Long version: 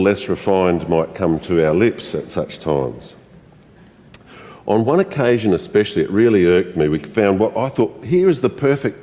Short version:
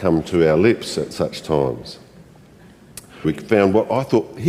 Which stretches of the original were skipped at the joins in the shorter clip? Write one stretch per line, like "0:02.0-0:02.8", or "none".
0:04.4-0:06.9